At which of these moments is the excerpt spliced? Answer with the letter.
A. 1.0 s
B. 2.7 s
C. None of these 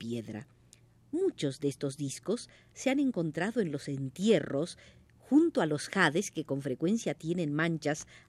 B